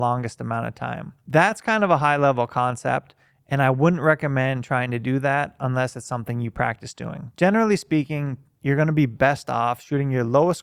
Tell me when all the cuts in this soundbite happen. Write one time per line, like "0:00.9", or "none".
none